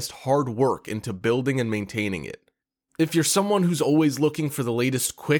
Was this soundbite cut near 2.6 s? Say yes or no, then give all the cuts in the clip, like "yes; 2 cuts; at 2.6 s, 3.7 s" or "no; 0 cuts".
no; 0 cuts